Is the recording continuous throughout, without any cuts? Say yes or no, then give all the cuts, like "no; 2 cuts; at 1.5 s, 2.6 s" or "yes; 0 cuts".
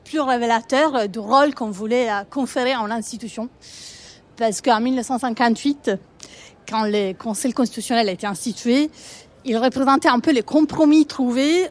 yes; 0 cuts